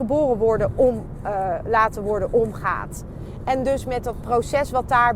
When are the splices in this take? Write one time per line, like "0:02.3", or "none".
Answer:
none